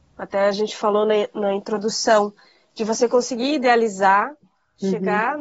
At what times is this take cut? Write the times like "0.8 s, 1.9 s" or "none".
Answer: none